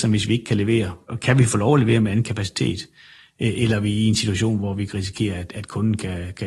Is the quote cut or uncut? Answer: uncut